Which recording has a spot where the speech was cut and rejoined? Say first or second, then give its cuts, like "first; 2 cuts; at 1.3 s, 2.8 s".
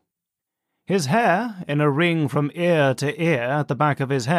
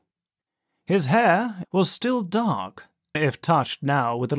second; 2 cuts; at 1.6 s, 3.1 s